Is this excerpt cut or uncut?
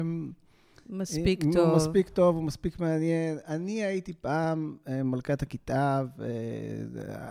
uncut